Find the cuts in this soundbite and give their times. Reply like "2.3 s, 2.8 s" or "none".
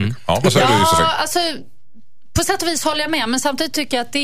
none